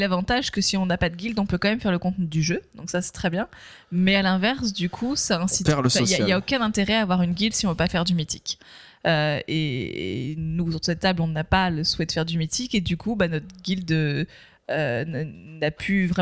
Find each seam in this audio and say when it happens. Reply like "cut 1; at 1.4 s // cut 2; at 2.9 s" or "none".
none

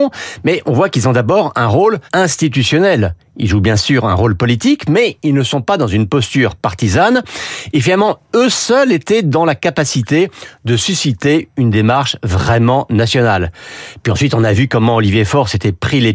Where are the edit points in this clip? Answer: cut 1; at 2.1 s

